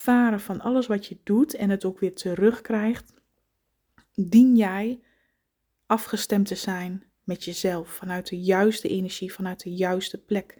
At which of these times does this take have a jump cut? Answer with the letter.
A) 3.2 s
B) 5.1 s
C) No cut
C